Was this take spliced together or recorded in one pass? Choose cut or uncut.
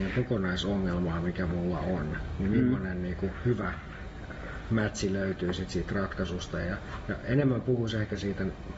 uncut